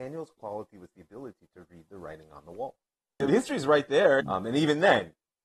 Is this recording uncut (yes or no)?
no